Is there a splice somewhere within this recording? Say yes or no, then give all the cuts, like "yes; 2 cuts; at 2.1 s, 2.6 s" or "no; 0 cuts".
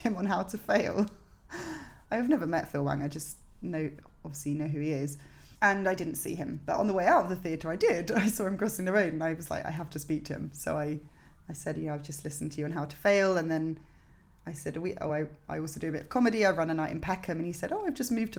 no; 0 cuts